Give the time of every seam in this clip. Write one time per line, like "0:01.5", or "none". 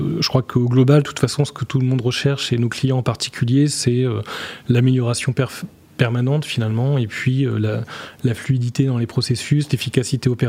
none